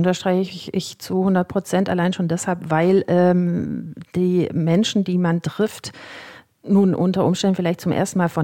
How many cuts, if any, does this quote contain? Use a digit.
0